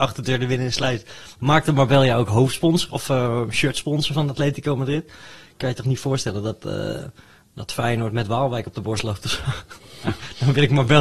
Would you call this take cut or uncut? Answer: uncut